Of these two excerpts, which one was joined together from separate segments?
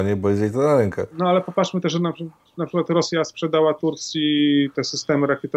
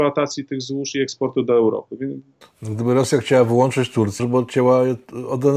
second; 2 cuts; at 2.4 s, 4.2 s

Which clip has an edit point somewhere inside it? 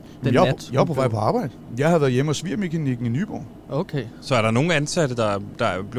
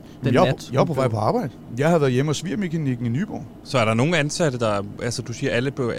second; 2 cuts; at 3.6 s, 5.0 s

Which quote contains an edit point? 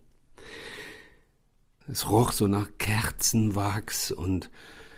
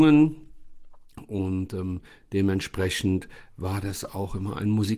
first; 1 cut; at 1.8 s

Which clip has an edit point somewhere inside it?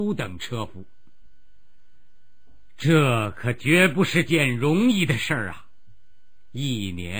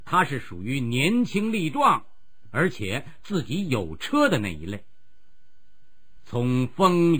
second; 1 cut; at 6.2 s

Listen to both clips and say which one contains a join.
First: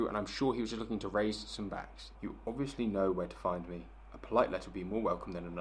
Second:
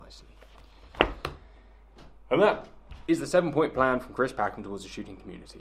first; 1 cut; at 2.2 s

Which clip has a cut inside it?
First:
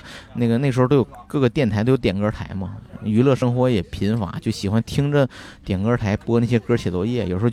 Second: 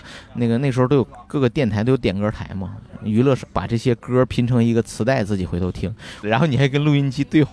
second; 2 cuts; at 3.4 s, 6.2 s

